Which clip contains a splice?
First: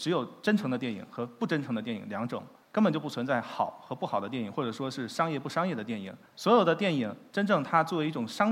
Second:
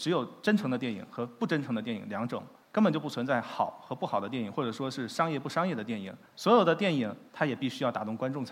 second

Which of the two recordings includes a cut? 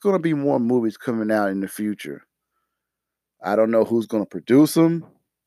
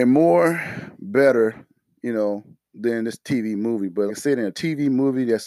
second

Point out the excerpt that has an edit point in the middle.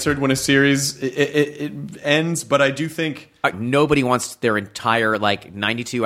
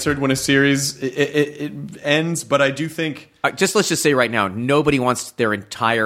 first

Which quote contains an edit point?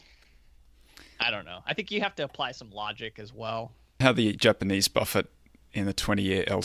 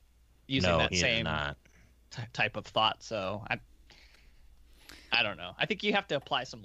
first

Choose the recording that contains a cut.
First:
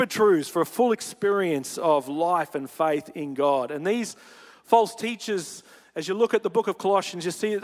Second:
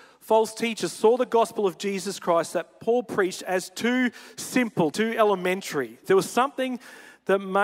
second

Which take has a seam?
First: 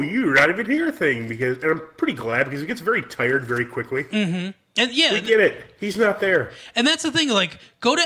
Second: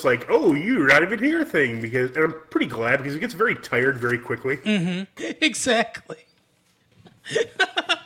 second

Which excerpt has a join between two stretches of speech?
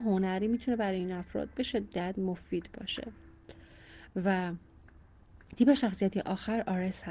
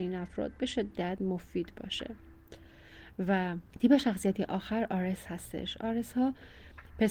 second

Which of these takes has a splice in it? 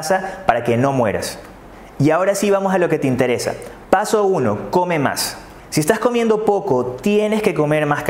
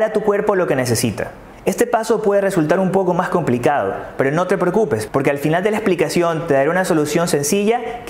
first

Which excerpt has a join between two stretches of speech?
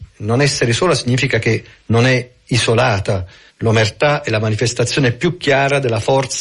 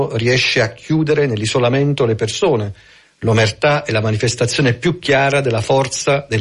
first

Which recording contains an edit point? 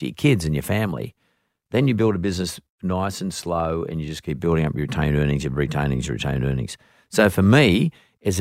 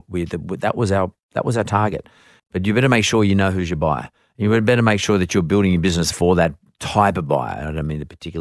second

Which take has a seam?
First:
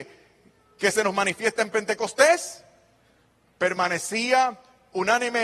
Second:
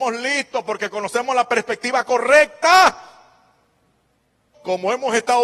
second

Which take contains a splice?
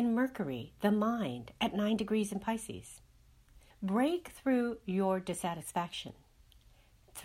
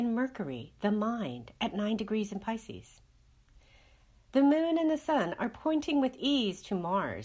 first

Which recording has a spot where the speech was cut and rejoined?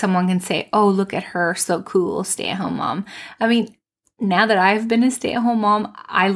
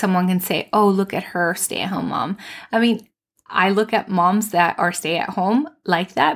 second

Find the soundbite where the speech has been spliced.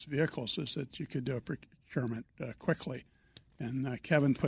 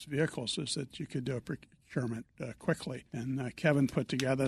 second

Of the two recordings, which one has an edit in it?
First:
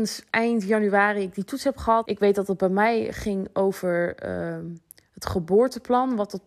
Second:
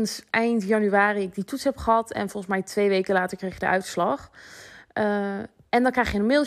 first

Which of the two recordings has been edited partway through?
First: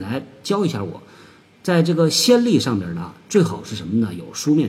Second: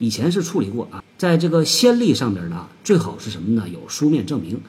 second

